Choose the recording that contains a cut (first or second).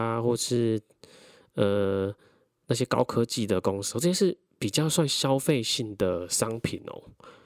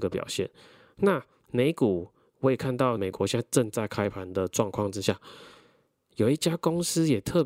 second